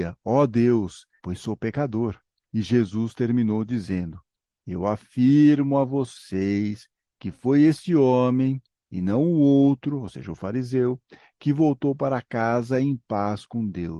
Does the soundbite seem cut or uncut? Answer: cut